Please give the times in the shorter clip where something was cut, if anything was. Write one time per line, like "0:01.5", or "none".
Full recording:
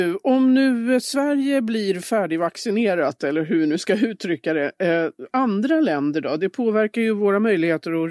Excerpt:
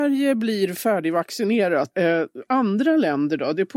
0:01.9